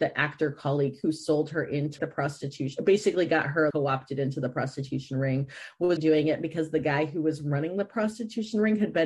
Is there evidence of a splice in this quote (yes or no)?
yes